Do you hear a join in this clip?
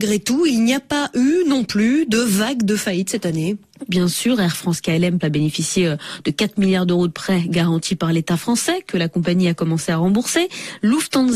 yes; 2 cuts; at 3.9 s, 5.2 s

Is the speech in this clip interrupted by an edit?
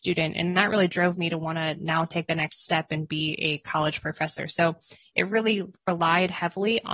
no; 0 cuts

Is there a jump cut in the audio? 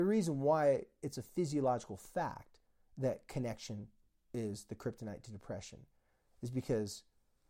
no; 0 cuts

